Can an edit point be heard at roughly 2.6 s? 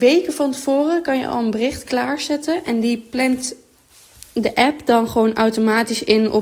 no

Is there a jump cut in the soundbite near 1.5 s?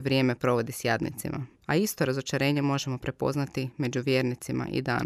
yes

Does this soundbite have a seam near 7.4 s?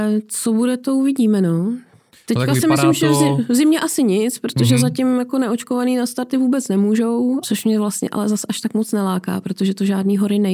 yes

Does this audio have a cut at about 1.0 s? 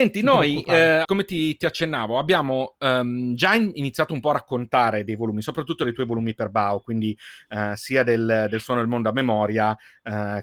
yes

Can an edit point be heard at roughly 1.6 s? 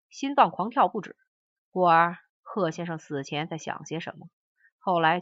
yes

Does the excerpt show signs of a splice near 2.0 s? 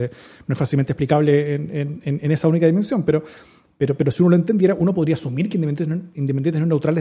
yes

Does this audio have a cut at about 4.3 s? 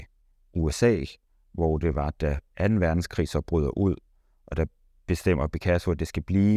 no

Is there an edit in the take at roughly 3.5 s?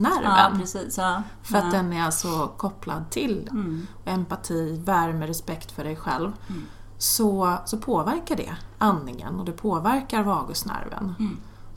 yes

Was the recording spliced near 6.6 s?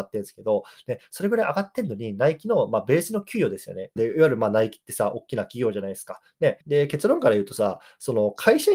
yes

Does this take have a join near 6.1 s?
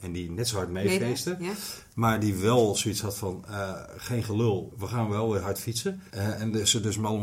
yes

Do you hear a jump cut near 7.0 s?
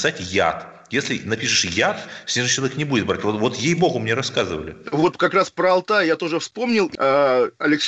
yes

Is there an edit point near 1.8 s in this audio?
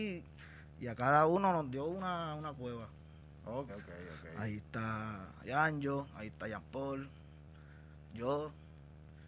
no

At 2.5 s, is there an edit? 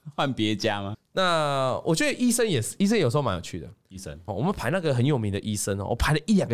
no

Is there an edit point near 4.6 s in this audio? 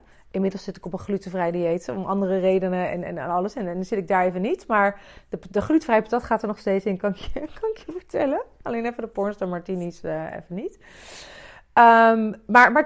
no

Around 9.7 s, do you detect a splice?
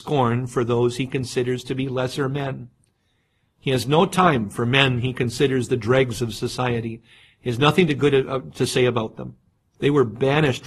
yes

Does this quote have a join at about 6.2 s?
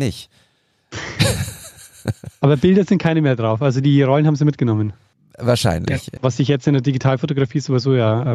yes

